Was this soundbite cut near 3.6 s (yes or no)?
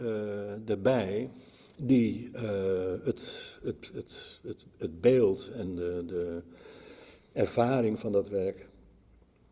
no